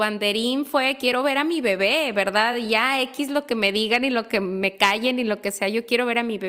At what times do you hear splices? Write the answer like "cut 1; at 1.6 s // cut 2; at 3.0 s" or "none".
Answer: none